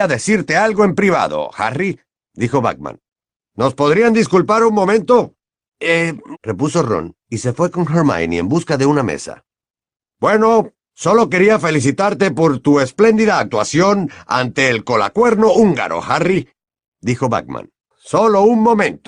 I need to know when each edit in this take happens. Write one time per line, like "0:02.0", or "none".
0:06.3
0:10.0
0:17.9